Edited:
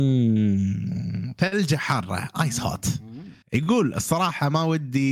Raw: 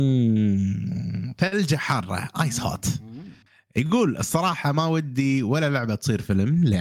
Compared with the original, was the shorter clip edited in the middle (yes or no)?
yes